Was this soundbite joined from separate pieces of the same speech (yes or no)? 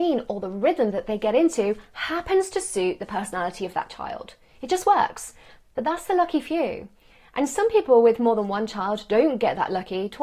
no